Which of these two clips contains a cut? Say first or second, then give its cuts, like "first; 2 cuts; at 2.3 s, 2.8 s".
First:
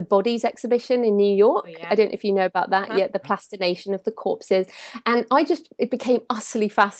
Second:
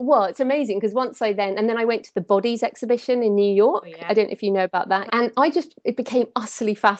second; 1 cut; at 5.1 s